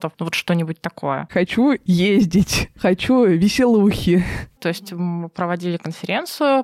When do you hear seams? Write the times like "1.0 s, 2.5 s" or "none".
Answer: 1.3 s, 4.6 s